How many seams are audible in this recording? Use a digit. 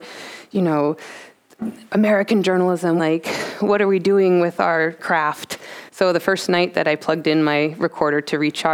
2